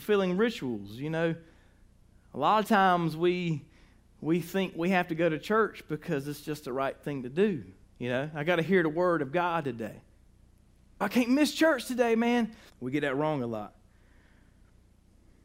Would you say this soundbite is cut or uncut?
cut